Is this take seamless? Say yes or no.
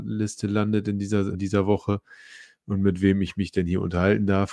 no